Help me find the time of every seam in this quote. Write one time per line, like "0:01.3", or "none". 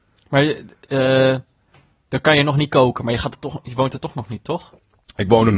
none